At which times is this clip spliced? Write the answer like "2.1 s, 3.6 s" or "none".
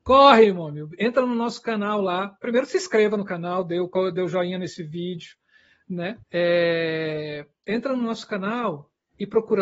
6.2 s